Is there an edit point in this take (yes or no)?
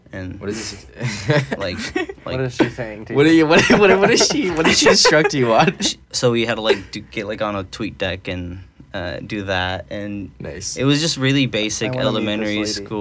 no